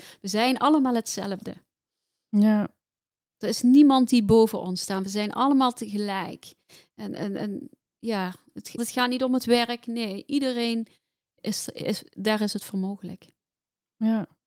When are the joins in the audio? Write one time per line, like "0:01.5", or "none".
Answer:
0:08.8